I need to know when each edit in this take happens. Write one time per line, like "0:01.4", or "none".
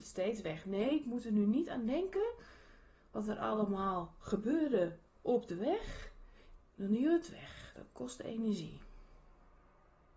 0:06.6

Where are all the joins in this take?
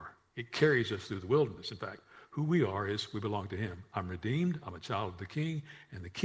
none

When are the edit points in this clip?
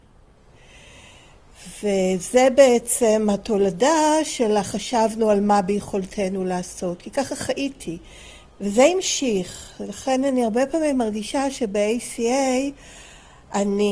0:08.4

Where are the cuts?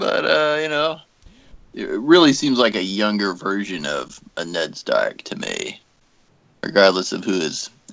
0:01.6

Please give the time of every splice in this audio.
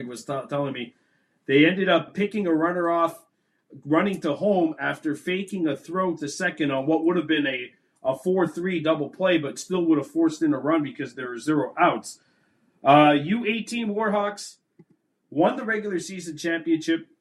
0:02.1

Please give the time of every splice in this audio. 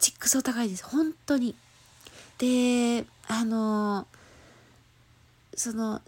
0:02.3

